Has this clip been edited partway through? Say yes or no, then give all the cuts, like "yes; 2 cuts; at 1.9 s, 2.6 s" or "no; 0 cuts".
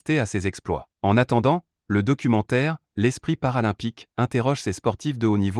yes; 2 cuts; at 0.9 s, 2.9 s